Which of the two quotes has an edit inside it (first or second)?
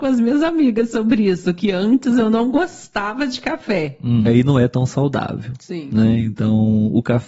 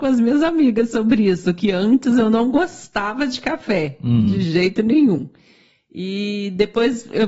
first